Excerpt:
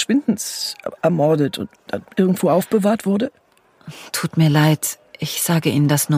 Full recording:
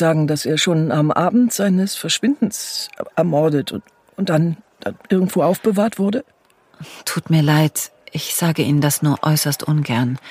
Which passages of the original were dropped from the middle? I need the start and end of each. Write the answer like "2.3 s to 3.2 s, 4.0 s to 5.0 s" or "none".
3.9 s to 4.7 s